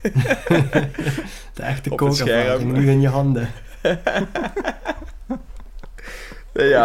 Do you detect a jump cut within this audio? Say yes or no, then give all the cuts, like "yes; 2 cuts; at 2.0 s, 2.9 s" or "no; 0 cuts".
no; 0 cuts